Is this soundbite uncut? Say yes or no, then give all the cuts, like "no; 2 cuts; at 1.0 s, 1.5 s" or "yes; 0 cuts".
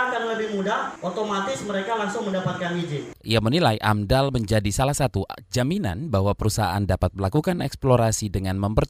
no; 1 cut; at 3.2 s